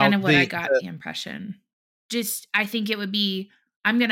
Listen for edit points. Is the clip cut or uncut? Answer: cut